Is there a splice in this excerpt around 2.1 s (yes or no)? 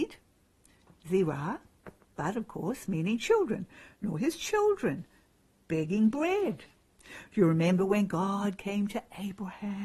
no